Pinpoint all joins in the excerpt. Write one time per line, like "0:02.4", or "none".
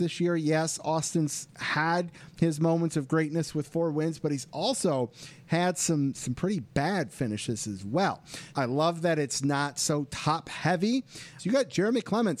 0:08.5
0:11.4